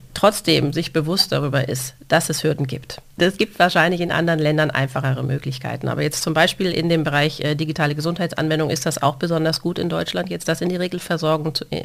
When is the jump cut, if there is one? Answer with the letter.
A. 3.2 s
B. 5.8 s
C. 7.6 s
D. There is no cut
A